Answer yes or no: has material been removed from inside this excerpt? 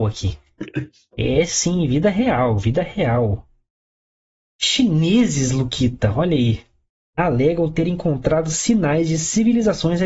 no